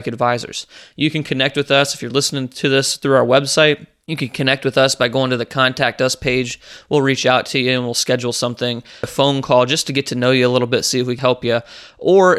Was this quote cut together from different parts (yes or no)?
yes